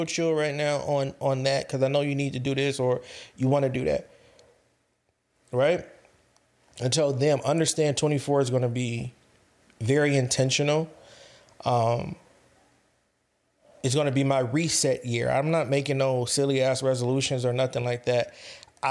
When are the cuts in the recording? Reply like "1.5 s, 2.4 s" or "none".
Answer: none

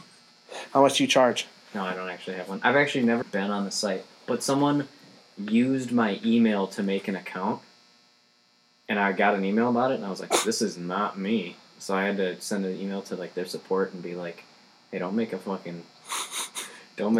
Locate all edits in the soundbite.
3.2 s

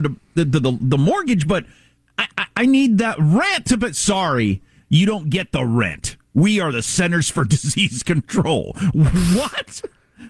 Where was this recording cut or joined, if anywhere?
none

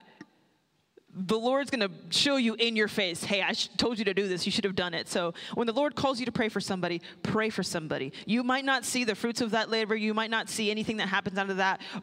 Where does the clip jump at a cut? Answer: none

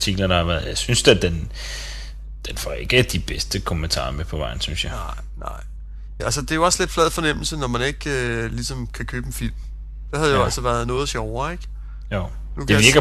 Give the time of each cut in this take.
6.2 s

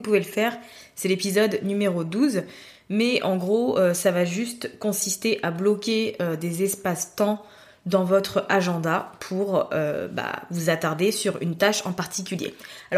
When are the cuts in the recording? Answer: none

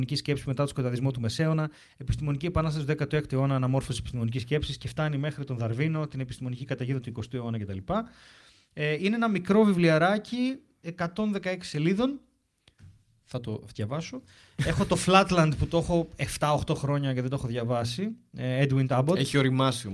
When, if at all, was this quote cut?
none

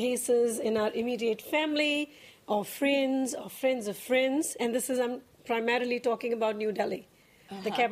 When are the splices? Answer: none

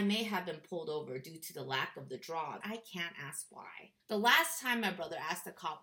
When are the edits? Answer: 2.6 s, 4.0 s

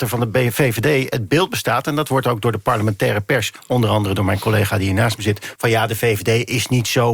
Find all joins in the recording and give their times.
5.6 s

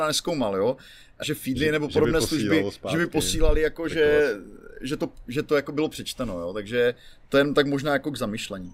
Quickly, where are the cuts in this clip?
1.2 s

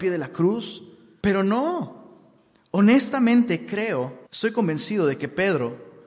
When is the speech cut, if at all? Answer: 1.2 s, 4.3 s

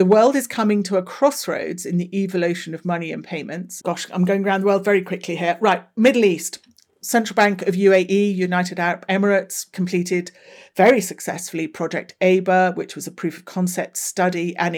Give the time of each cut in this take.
3.8 s

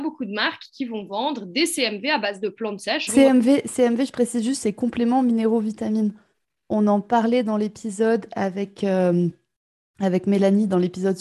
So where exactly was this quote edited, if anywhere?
3.1 s

